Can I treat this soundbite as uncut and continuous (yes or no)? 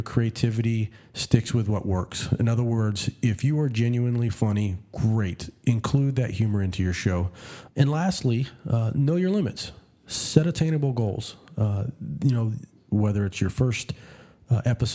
no